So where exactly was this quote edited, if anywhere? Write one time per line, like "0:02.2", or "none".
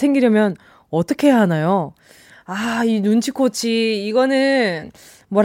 none